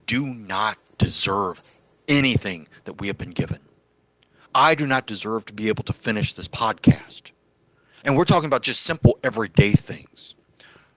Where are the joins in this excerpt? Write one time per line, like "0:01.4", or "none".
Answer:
0:04.5
0:08.0